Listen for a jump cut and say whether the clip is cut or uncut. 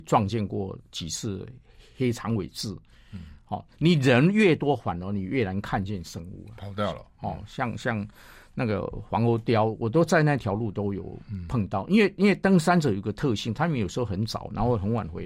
uncut